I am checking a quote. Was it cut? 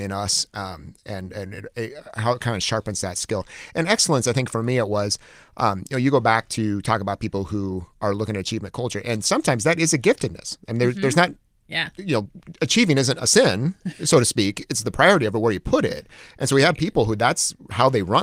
no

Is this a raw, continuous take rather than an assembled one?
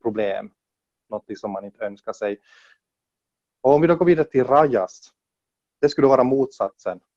yes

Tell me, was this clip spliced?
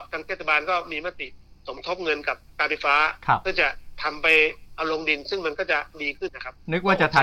yes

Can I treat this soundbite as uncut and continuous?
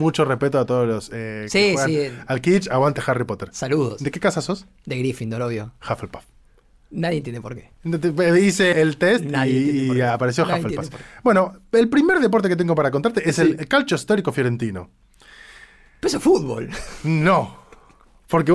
no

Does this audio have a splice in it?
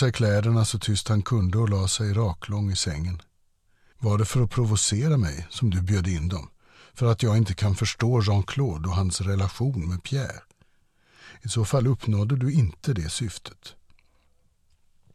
yes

